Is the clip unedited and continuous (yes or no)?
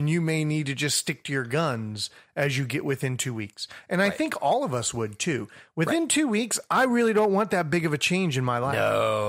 yes